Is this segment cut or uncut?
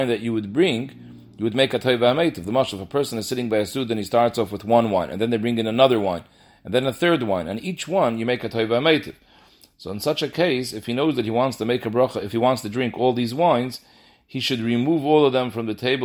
uncut